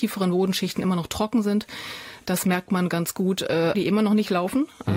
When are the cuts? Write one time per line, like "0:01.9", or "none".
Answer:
0:03.7